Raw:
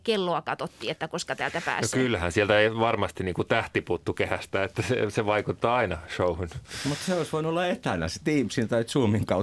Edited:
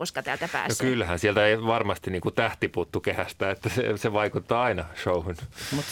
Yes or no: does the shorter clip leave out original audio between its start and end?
no